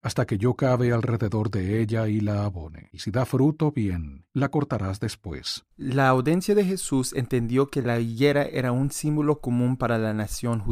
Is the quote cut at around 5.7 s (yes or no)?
yes